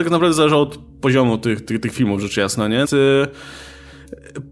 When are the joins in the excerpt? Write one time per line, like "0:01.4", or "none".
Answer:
0:02.8